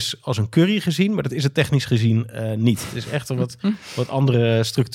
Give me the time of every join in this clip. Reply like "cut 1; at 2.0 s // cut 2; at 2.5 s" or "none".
none